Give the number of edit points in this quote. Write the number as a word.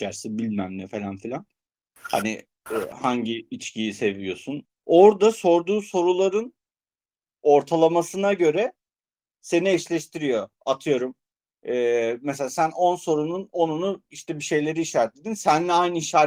one